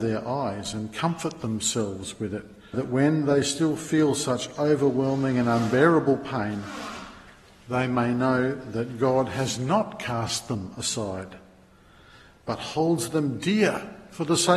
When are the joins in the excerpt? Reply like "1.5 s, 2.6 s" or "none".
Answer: 2.7 s